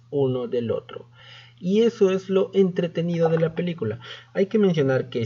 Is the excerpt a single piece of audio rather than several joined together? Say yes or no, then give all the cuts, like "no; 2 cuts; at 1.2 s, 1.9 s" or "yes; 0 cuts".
yes; 0 cuts